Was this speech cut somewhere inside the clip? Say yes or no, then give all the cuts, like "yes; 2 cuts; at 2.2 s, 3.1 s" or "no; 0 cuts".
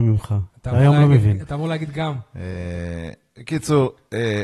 no; 0 cuts